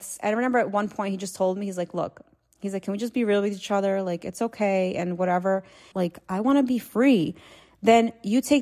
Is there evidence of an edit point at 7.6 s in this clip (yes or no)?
no